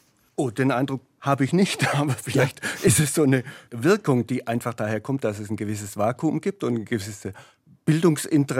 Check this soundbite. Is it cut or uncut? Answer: uncut